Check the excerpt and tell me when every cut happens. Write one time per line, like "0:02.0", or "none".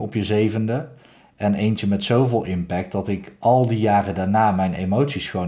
none

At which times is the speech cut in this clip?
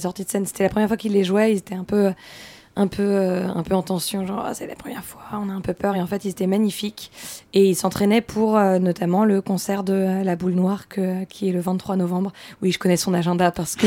none

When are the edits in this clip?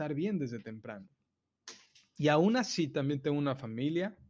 none

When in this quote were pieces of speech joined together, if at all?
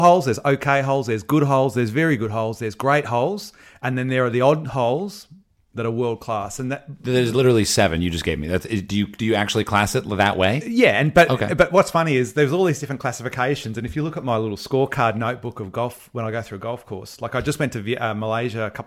none

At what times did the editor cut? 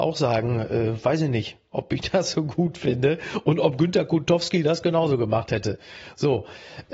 none

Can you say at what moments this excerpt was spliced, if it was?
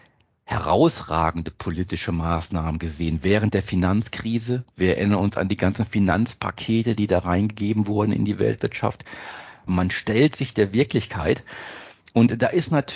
0:09.7

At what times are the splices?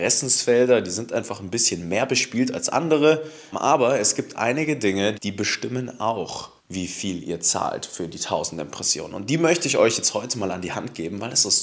0:03.5
0:05.1
0:06.6

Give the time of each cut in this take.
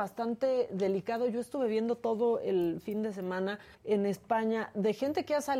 0:03.7

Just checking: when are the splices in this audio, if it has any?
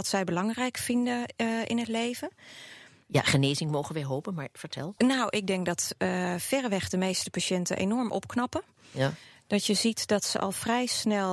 0:03.0

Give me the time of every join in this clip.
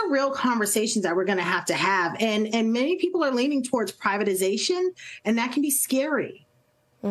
none

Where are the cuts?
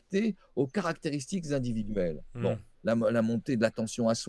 0:02.7

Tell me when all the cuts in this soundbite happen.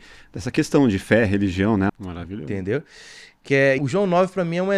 0:01.9
0:03.8

